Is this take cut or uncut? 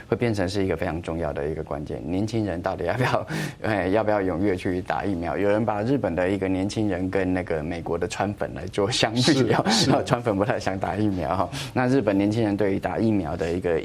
uncut